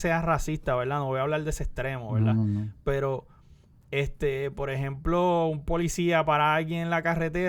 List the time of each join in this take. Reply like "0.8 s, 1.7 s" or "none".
none